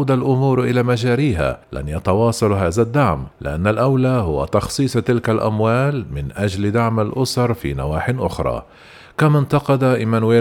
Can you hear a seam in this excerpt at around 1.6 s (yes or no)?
yes